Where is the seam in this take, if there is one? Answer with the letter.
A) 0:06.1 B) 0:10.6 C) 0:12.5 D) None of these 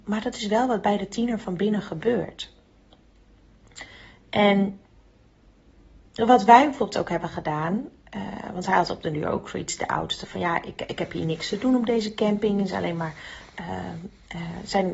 A